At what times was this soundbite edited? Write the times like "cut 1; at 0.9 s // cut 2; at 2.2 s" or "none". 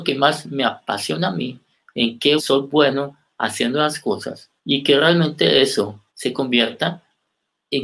cut 1; at 2.4 s // cut 2; at 4.6 s // cut 3; at 6.1 s